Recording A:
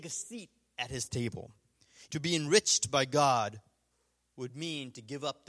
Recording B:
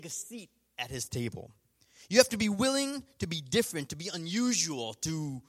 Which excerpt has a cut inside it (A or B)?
A